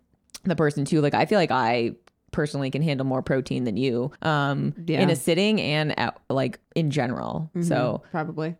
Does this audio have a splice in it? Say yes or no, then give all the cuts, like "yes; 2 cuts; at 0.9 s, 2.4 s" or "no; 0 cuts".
yes; 2 cuts; at 4.2 s, 6.7 s